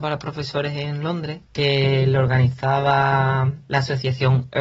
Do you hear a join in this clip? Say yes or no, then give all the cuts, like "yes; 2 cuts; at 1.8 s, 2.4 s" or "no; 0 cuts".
yes; 1 cut; at 1.4 s